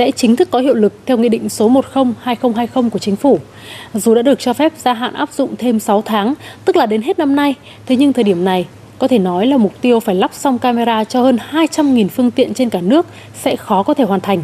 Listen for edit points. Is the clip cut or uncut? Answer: uncut